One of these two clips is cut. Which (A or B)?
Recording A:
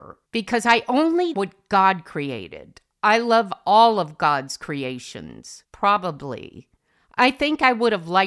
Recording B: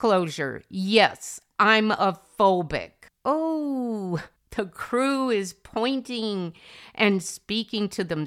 A